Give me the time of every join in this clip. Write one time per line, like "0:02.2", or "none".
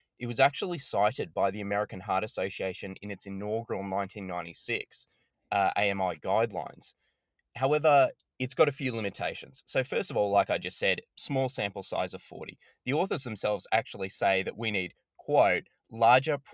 none